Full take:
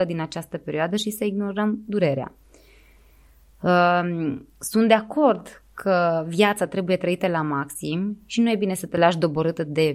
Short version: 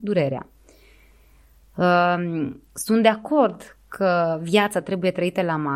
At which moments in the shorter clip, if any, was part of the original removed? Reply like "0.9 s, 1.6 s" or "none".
none

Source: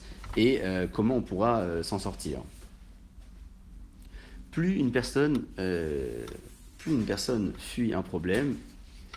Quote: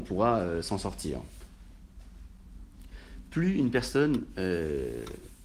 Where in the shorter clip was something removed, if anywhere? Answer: none

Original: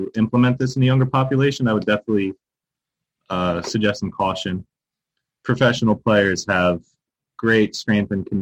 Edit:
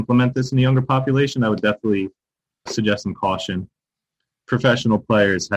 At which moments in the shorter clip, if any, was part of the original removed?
2.7 s

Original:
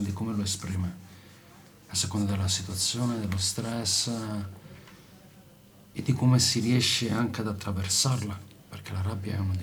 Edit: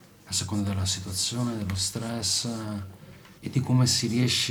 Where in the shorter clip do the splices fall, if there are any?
3.4 s

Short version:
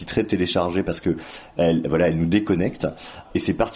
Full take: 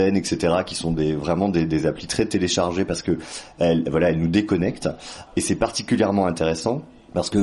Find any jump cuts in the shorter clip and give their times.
none

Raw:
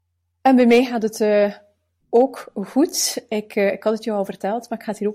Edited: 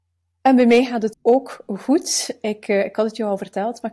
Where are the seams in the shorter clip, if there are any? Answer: 1.1 s

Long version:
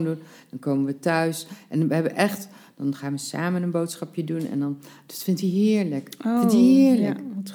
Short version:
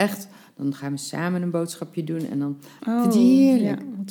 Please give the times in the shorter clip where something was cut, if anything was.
2.8 s

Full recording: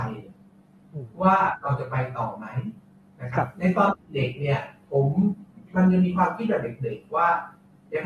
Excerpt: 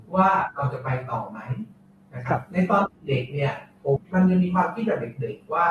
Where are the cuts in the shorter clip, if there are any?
4.0 s

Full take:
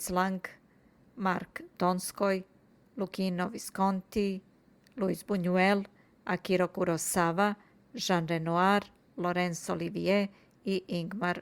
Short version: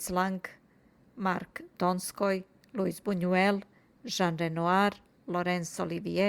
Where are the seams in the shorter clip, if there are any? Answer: 2.6 s, 4.0 s

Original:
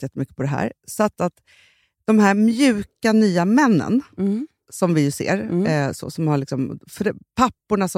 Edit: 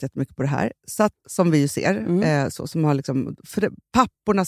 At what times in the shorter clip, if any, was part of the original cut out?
1.1 s

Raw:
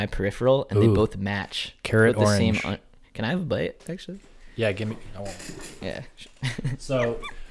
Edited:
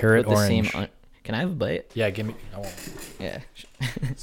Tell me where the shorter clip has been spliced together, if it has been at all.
1.9 s

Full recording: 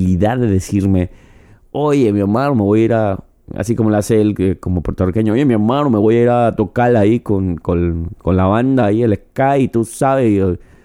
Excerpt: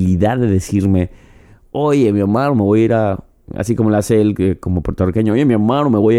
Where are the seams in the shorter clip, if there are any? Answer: none

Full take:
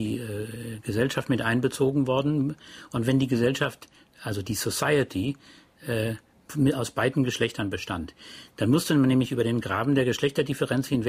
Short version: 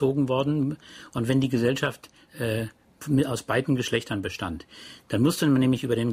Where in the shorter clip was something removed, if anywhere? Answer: 2.3 s

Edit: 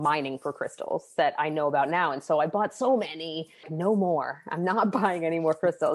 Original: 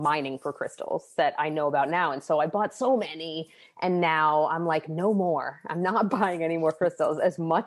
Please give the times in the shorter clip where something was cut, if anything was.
3.6 s

